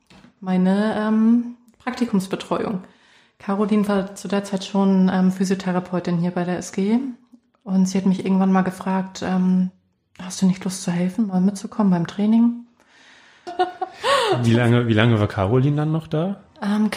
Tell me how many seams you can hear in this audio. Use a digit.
1